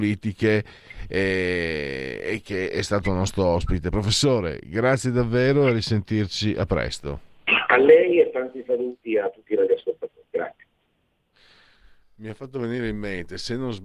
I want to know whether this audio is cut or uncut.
uncut